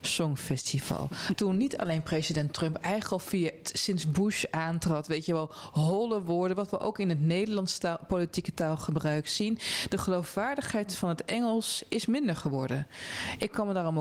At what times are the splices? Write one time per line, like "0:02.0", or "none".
0:01.3